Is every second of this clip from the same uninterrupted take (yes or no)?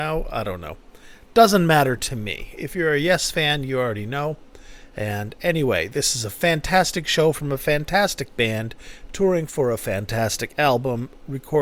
yes